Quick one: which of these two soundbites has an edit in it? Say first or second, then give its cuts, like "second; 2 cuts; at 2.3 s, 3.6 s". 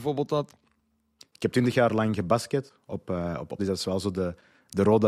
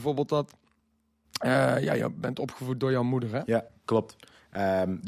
first; 2 cuts; at 1.2 s, 3.6 s